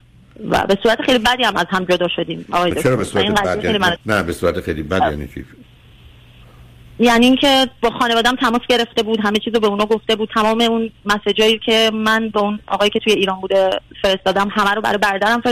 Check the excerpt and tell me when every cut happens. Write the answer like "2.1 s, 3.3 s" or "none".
4.0 s